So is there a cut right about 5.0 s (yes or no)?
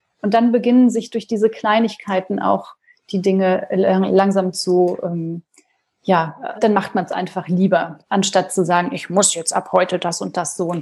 no